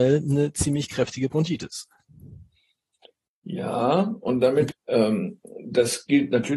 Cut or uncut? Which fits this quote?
cut